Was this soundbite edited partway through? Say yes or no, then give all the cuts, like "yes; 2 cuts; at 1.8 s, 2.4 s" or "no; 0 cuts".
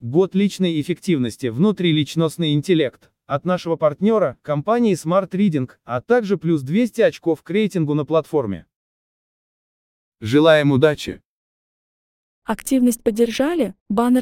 no; 0 cuts